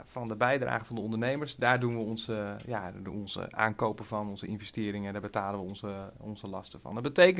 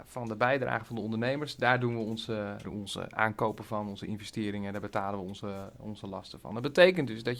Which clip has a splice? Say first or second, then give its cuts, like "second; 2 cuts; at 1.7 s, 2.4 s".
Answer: second; 1 cut; at 2.6 s